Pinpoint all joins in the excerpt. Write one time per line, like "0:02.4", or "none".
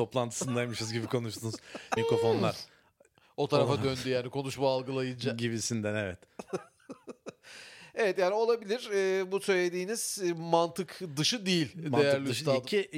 0:02.0